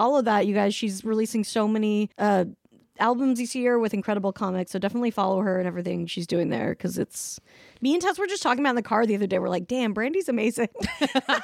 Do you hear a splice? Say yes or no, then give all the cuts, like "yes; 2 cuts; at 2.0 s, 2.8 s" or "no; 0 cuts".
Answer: yes; 1 cut; at 2.1 s